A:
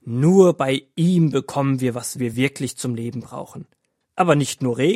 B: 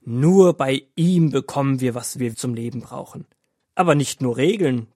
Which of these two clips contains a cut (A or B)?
B